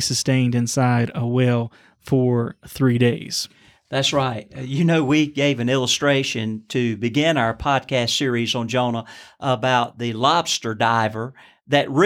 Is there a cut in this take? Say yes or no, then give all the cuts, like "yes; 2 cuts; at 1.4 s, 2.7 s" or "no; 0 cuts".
no; 0 cuts